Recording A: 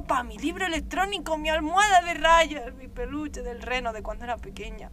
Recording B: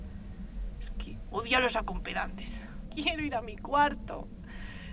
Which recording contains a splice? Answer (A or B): B